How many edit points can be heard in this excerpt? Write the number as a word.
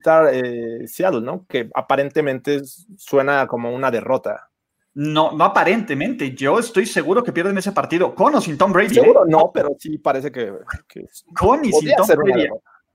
zero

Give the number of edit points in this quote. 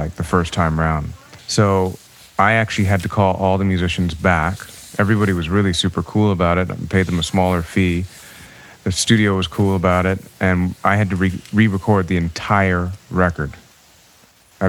one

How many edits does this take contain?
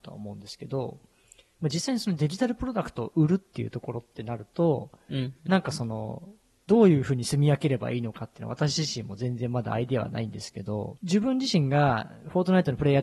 one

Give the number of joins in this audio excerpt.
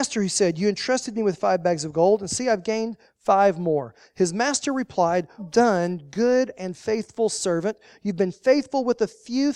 one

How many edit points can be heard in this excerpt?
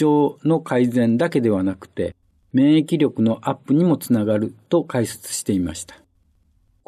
one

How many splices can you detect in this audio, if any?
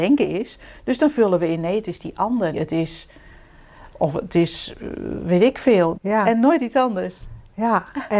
two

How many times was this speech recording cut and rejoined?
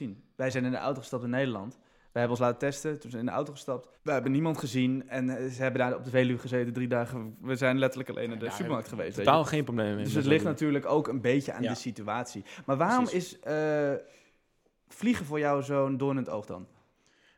one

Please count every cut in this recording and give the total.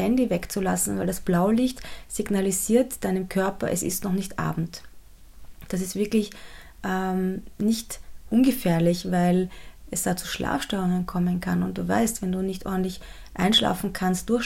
zero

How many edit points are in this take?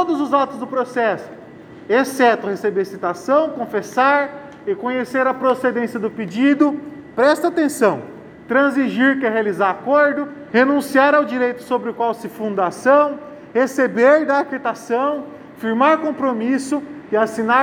one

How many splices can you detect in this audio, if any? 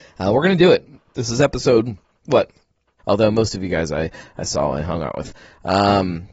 one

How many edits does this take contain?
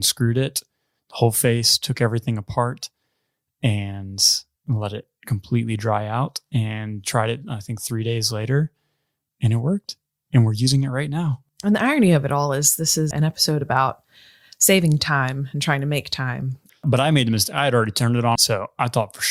three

